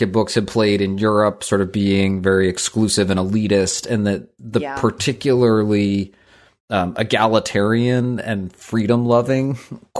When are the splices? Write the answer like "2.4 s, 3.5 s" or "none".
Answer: none